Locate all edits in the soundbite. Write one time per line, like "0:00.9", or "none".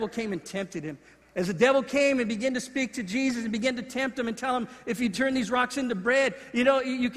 0:01.2